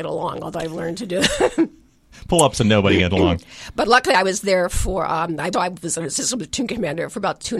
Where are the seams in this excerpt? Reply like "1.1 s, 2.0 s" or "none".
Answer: 5.5 s

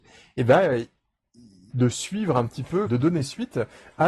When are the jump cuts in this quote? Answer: 1.7 s, 2.9 s

